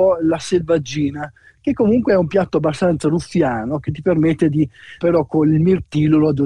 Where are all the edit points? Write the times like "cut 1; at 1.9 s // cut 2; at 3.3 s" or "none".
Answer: cut 1; at 5.0 s

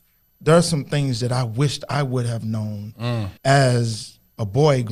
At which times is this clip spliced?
cut 1; at 3.4 s

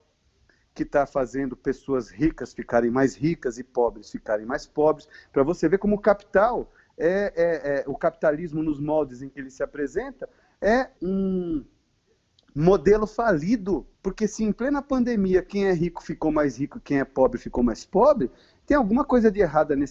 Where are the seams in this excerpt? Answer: cut 1; at 11.0 s // cut 2; at 13.9 s

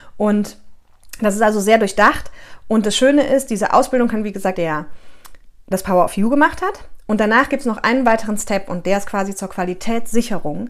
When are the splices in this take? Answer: cut 1; at 4.5 s

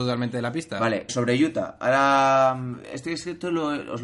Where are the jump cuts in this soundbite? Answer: cut 1; at 1.1 s // cut 2; at 2.8 s

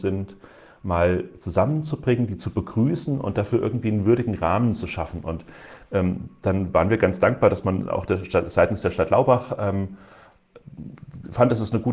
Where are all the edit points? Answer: none

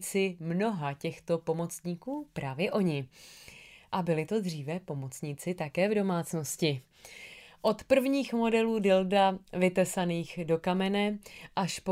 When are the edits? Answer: none

